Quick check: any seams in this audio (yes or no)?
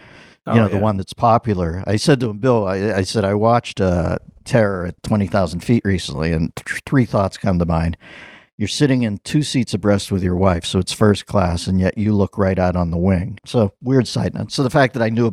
yes